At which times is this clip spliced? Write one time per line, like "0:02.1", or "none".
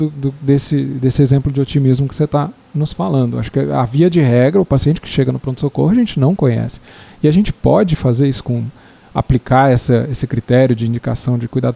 none